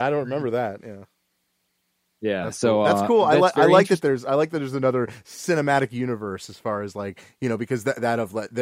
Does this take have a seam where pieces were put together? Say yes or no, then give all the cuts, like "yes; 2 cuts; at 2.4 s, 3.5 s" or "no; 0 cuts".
no; 0 cuts